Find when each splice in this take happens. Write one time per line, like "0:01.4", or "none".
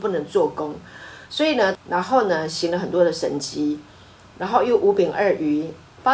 0:01.7